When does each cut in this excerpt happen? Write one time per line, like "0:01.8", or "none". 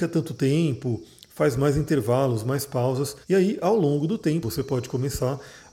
0:03.2
0:04.4